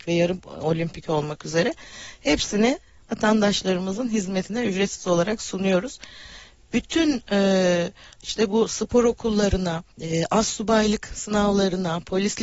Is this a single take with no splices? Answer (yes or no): no